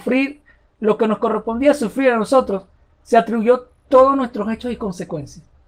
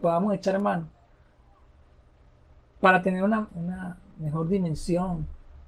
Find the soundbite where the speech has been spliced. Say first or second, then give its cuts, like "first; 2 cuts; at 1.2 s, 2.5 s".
second; 1 cut; at 3.5 s